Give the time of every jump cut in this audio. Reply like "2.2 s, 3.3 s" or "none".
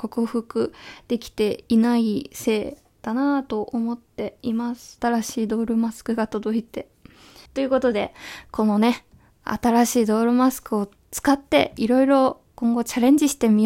5.0 s, 7.5 s